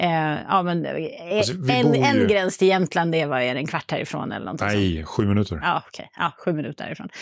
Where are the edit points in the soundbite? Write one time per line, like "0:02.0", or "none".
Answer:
none